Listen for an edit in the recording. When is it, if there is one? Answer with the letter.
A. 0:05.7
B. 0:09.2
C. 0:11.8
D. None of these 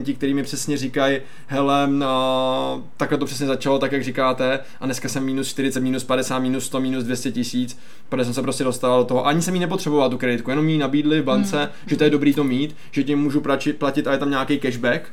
D